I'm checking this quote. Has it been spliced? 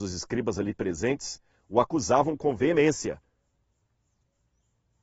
no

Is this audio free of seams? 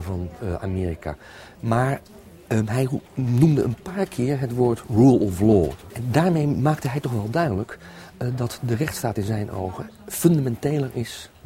no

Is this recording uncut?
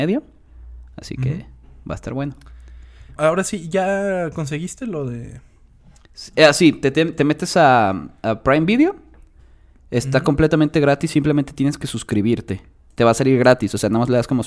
no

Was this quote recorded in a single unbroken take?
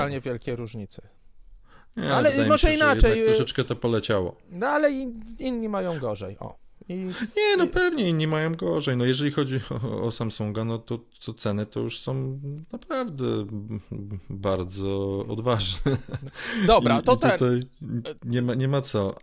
yes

